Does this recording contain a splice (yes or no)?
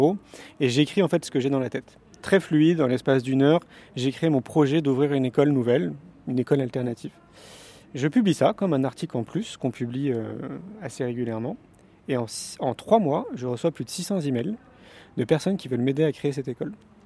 no